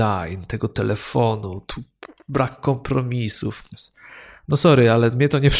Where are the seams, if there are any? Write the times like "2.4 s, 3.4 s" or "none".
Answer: 3.7 s